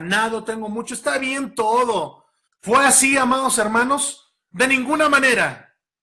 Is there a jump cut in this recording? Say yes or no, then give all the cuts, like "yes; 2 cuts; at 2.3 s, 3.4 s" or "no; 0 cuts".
yes; 1 cut; at 2.5 s